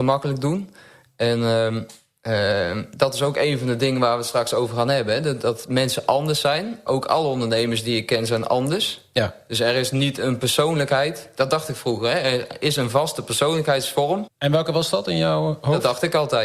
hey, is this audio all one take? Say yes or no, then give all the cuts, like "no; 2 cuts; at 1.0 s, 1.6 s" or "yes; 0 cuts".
no; 2 cuts; at 6.9 s, 14.3 s